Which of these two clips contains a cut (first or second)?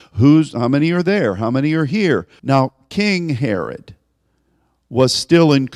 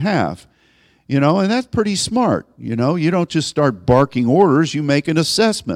first